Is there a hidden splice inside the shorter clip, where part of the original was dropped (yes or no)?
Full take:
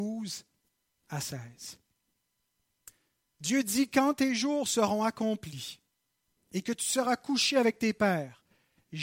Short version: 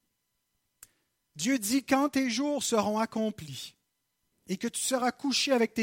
no